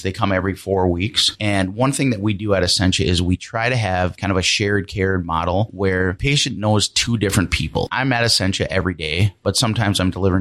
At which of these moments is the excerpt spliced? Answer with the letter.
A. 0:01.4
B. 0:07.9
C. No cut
C